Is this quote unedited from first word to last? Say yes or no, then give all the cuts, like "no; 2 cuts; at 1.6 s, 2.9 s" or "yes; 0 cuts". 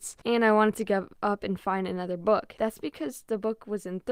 yes; 0 cuts